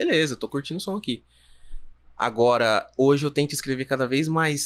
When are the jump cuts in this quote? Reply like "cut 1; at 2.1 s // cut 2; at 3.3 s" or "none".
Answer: none